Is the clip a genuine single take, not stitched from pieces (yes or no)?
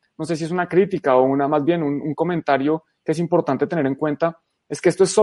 yes